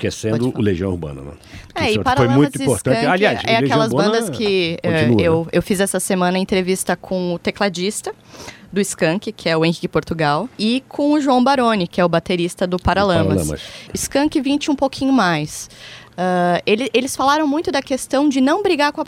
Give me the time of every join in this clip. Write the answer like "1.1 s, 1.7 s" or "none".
10.5 s, 13.9 s